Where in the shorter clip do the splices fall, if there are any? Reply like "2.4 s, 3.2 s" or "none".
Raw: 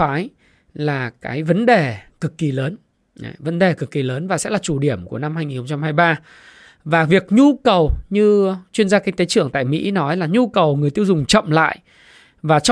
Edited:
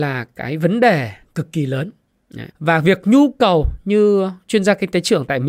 2.5 s

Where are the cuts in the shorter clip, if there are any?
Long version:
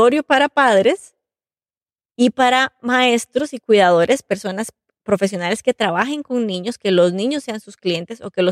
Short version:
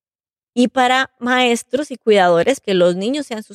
2.6 s

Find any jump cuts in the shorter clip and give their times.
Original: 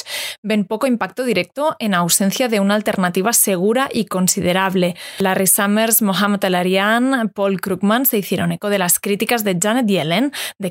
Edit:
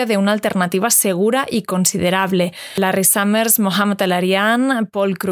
none

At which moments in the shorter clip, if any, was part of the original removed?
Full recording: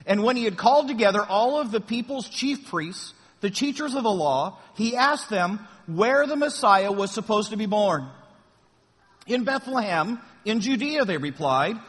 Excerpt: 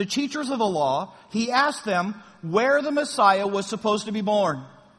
none

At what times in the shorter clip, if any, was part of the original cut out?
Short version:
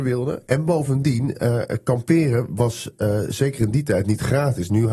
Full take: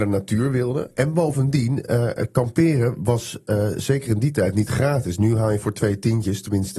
none

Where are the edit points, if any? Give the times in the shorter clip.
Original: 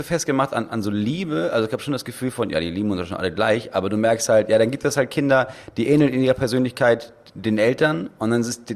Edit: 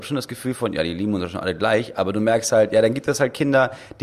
none

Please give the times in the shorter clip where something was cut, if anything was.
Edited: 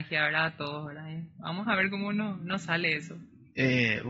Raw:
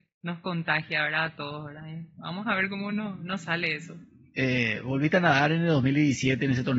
none

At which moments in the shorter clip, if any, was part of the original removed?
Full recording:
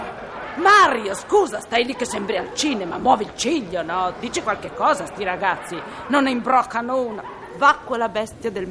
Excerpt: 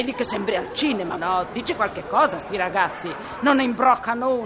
1.2 s

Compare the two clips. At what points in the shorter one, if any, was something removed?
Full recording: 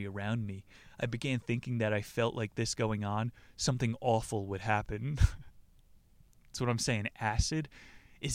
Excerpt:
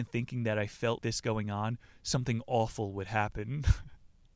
1.0 s

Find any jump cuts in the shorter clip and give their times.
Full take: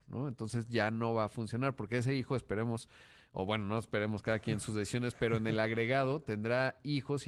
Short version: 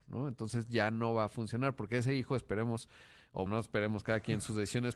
3.5 s

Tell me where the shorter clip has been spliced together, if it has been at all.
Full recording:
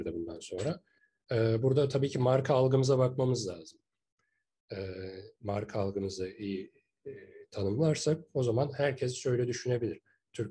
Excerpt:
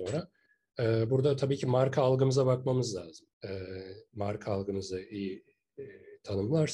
3.3 s

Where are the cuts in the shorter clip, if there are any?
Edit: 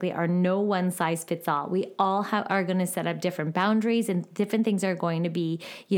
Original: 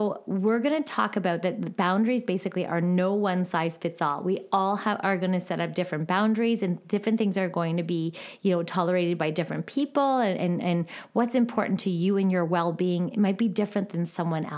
none

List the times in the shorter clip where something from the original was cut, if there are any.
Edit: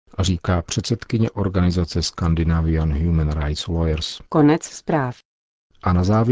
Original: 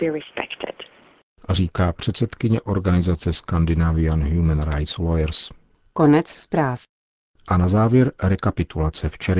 4.3 s

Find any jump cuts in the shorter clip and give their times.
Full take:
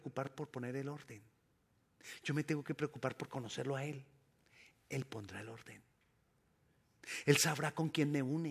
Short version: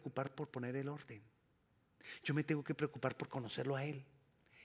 none

